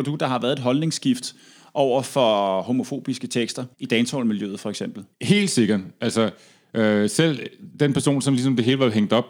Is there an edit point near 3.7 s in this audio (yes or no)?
yes